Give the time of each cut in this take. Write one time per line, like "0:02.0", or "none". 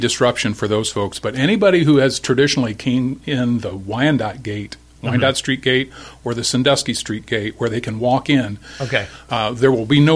none